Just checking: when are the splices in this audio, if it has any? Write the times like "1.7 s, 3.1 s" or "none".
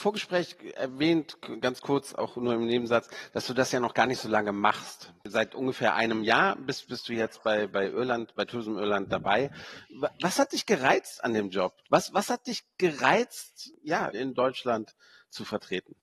11.8 s, 14.1 s